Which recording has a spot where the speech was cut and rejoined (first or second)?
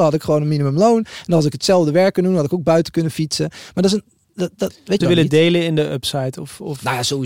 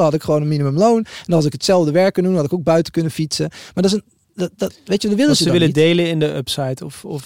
first